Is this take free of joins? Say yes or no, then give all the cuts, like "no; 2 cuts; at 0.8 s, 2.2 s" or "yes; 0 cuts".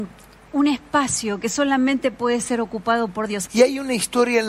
no; 1 cut; at 3.5 s